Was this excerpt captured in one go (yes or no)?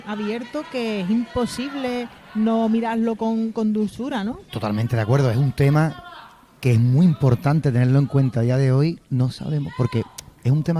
no